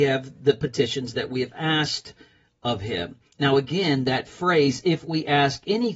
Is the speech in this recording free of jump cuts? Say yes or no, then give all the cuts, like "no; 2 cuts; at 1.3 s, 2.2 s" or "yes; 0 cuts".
yes; 0 cuts